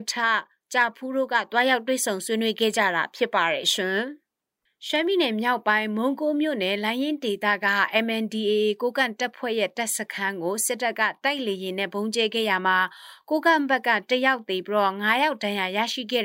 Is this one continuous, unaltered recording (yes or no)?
yes